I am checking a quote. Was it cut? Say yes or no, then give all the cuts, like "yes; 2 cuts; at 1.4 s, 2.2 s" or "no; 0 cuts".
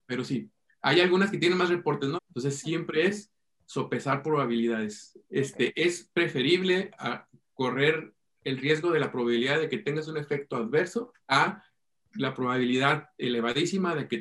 yes; 3 cuts; at 2.2 s, 5.2 s, 11.2 s